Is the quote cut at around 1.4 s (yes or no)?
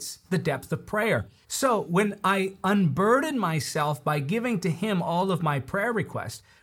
yes